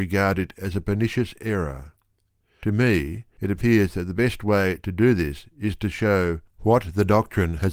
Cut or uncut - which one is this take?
uncut